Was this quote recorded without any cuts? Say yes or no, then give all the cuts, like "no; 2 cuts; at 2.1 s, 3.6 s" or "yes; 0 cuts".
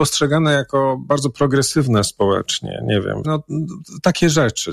no; 1 cut; at 3.2 s